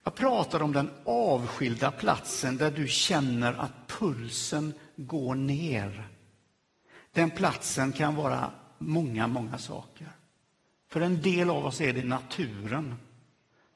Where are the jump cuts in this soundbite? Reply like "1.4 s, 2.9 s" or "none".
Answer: none

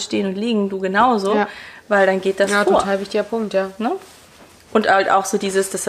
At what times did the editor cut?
none

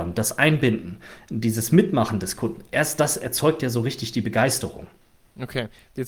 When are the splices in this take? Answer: none

